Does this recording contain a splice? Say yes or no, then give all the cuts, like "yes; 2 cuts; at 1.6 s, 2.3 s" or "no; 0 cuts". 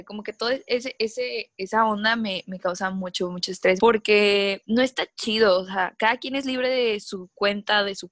yes; 1 cut; at 3.8 s